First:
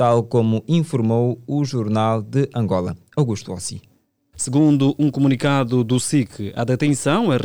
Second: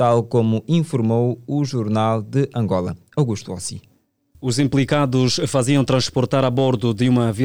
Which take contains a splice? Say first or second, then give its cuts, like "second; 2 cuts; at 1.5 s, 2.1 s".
first; 1 cut; at 4.3 s